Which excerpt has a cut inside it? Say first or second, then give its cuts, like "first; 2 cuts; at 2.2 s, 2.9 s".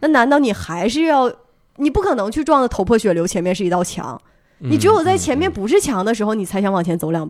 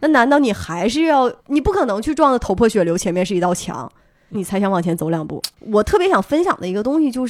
second; 3 cuts; at 1.4 s, 4.3 s, 5.5 s